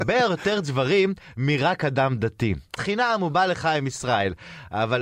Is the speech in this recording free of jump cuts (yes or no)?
no